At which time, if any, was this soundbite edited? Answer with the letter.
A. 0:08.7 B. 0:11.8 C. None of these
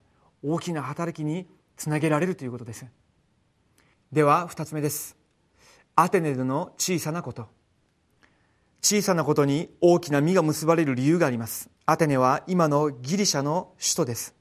B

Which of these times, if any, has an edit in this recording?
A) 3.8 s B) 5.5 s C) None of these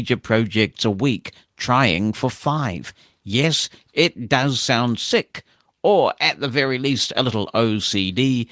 C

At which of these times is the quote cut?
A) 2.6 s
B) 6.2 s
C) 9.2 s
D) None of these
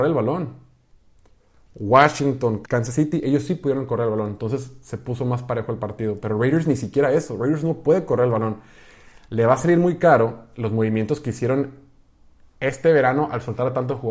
A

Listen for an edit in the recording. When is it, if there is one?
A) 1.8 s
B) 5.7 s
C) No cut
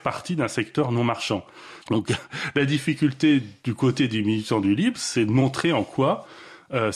A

